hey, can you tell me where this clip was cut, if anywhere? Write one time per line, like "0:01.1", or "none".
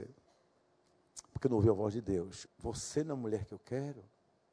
0:02.5